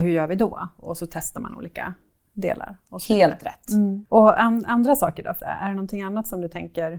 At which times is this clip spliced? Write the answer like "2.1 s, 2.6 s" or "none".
4.1 s, 5.4 s